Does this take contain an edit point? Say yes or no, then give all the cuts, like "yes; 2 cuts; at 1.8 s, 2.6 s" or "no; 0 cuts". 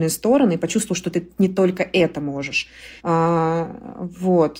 yes; 1 cut; at 3.0 s